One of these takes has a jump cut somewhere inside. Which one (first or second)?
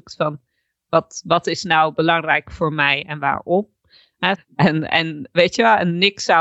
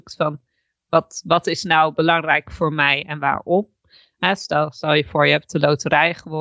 first